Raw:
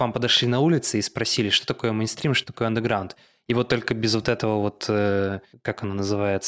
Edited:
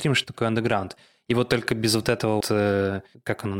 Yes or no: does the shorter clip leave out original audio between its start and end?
yes